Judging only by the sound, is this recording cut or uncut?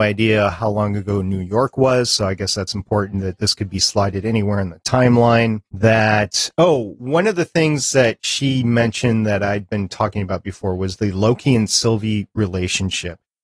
cut